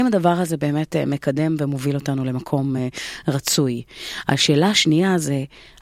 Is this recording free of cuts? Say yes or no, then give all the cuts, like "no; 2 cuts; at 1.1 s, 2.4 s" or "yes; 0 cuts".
yes; 0 cuts